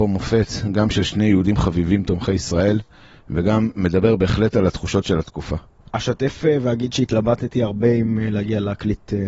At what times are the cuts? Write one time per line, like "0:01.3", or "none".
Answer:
0:05.8